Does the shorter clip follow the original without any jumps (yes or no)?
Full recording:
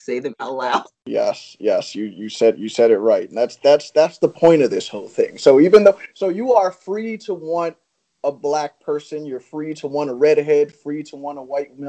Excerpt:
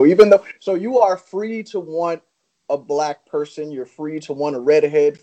yes